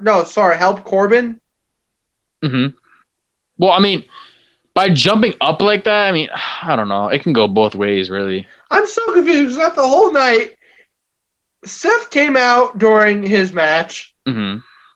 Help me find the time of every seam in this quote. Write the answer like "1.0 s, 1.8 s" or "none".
none